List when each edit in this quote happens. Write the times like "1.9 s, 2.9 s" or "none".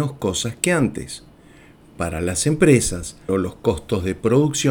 3.3 s